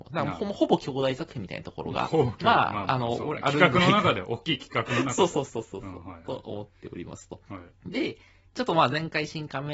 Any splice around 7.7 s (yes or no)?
yes